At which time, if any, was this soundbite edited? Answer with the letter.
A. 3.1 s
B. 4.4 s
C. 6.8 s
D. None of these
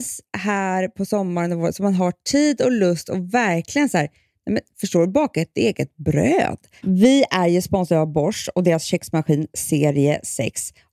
C